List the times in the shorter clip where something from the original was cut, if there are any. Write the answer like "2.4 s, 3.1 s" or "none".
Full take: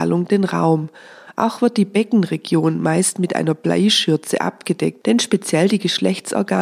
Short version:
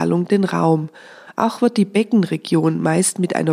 none